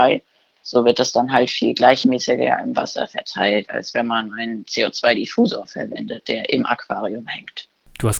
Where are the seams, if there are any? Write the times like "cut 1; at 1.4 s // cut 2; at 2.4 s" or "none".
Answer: none